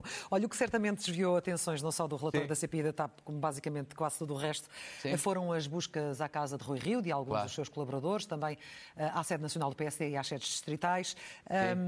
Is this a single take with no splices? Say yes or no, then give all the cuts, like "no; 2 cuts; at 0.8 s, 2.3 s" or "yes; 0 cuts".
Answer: yes; 0 cuts